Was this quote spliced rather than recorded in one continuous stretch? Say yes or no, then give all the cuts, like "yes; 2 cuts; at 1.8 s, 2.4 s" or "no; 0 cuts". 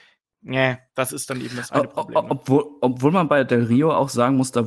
no; 0 cuts